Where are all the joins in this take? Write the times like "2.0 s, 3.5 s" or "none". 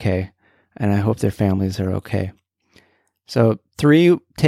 none